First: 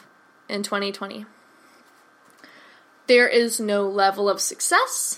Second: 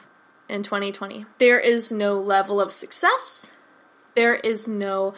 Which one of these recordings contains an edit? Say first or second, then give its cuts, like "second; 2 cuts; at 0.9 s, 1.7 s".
second; 1 cut; at 1.3 s